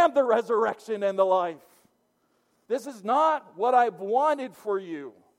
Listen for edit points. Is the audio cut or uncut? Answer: cut